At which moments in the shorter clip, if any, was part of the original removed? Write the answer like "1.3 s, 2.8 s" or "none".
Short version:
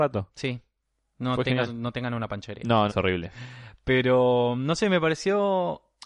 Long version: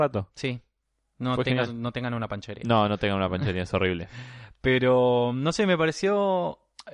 2.9 s